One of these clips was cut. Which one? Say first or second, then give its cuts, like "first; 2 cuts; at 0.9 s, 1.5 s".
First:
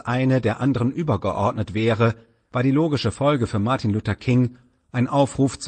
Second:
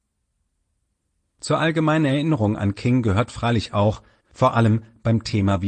second; 1 cut; at 4.2 s